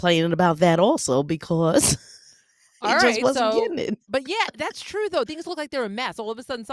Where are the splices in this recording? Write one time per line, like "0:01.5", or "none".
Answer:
0:04.1
0:05.3